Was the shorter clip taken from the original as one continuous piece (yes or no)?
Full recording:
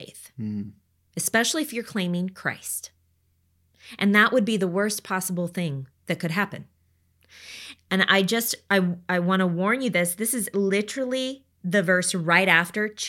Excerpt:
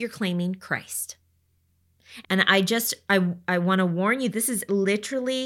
no